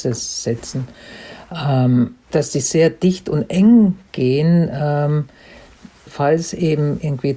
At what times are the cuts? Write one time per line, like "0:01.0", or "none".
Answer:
0:02.3
0:06.1